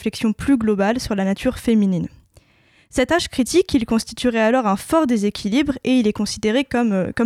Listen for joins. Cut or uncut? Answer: uncut